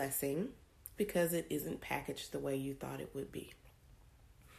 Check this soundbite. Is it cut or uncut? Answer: cut